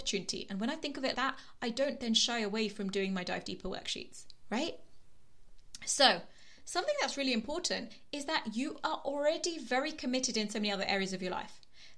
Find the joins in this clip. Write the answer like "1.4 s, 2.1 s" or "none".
1.1 s